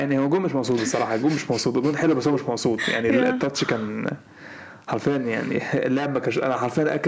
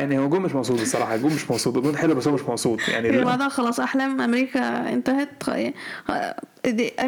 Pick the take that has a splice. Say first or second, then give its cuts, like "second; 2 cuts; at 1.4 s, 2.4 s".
second; 1 cut; at 3.2 s